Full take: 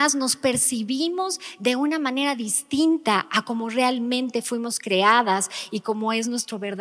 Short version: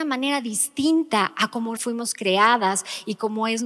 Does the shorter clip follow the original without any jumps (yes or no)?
no